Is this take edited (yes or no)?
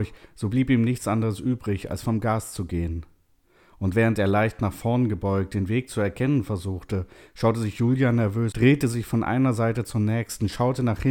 yes